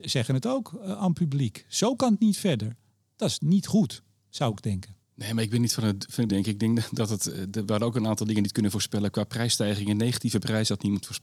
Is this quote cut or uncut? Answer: cut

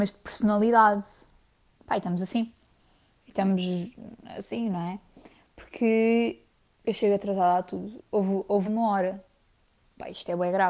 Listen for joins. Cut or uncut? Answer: cut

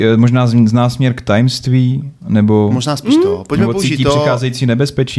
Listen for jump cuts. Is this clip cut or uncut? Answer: uncut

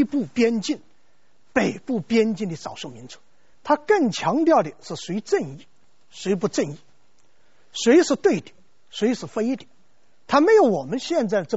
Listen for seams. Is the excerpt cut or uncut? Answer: cut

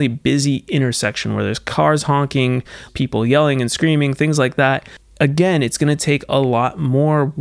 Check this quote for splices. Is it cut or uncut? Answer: cut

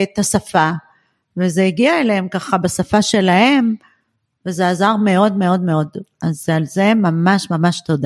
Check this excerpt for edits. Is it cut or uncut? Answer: uncut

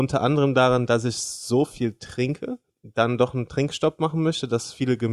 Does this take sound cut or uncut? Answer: uncut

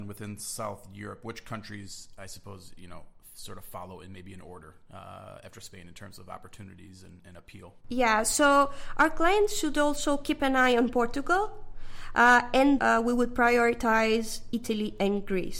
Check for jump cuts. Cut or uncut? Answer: cut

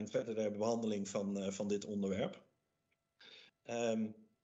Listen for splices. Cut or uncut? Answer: cut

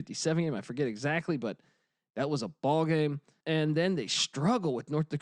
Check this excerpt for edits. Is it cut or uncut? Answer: cut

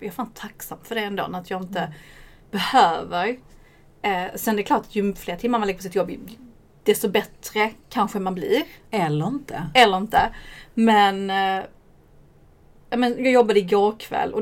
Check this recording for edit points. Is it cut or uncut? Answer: uncut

